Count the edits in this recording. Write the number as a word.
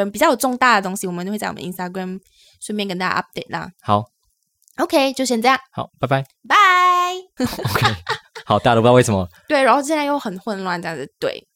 one